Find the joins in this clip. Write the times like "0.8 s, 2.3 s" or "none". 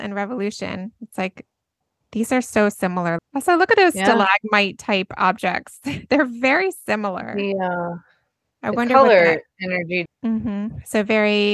3.2 s, 10.1 s